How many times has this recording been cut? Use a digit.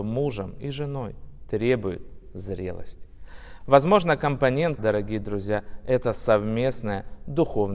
2